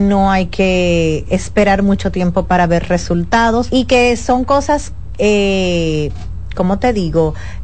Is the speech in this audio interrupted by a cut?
yes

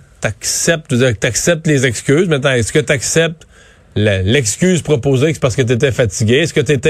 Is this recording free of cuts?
yes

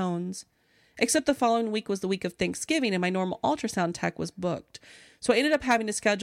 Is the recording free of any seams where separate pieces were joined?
yes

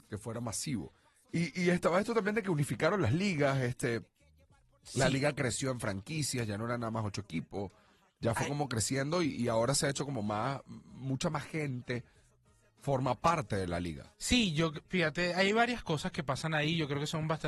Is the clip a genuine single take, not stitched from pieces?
yes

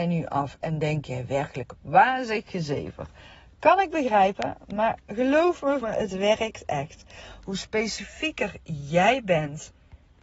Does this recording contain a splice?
yes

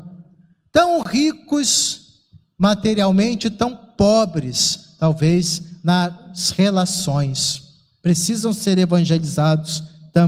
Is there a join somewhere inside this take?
no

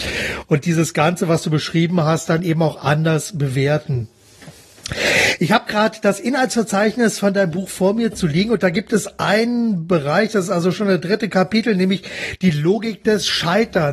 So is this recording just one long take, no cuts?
yes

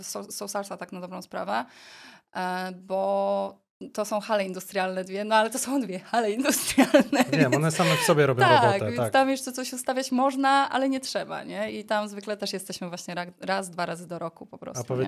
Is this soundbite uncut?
yes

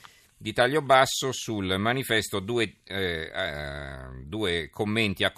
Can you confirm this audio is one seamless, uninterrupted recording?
yes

